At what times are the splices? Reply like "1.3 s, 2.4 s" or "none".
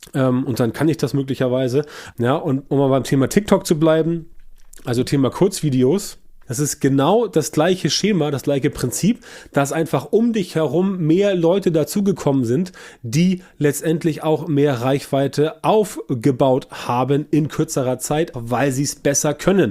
2.1 s, 6.4 s, 18.3 s